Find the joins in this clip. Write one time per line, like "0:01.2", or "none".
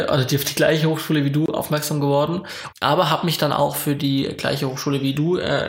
0:02.7